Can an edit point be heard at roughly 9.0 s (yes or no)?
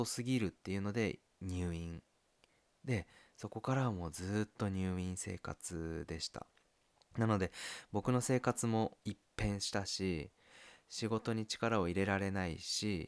yes